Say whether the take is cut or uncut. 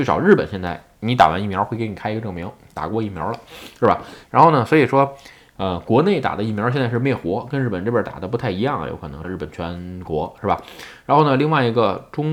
cut